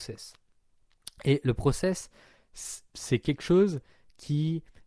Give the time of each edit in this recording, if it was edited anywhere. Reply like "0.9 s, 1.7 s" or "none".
none